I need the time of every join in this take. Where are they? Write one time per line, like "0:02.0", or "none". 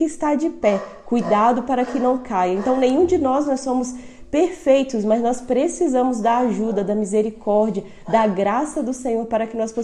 none